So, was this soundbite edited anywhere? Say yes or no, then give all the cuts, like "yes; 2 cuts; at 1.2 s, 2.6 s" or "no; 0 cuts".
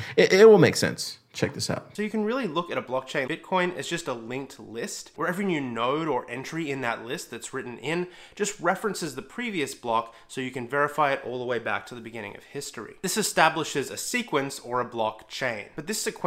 yes; 1 cut; at 3.3 s